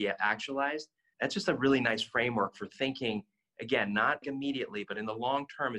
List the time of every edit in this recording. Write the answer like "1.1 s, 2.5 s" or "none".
1.1 s, 4.2 s